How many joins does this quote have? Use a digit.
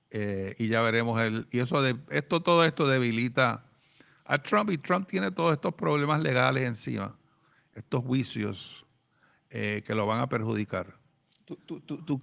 0